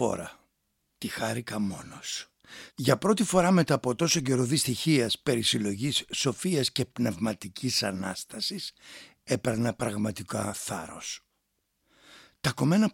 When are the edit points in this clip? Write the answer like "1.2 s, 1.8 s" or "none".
0.9 s, 2.7 s